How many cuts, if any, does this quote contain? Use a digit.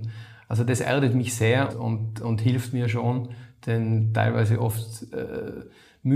1